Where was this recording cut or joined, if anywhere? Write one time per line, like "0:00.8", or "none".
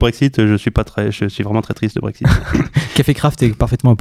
none